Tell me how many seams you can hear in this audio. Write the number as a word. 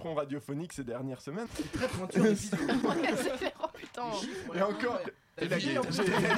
two